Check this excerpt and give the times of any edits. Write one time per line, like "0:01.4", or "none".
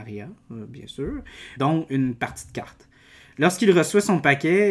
0:01.6